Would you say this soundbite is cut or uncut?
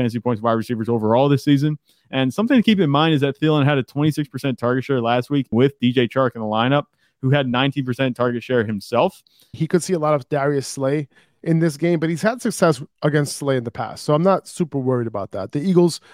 cut